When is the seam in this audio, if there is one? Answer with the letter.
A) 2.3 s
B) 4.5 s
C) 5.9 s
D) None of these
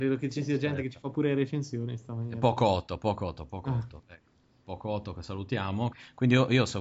C